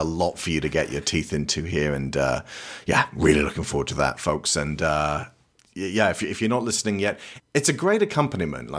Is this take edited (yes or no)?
no